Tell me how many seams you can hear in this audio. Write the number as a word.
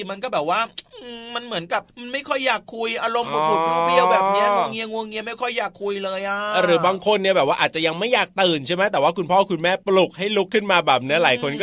two